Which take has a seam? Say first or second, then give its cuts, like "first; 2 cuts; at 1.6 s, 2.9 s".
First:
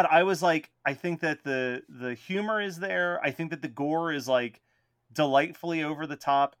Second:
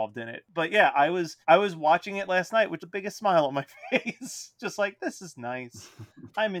second; 2 cuts; at 1.4 s, 2.8 s